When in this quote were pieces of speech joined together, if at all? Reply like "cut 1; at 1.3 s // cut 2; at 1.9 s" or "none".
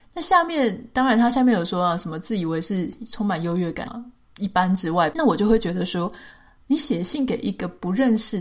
cut 1; at 3.9 s // cut 2; at 5.1 s